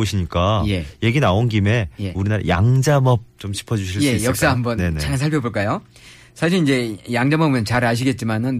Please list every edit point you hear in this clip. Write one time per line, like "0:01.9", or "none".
0:03.3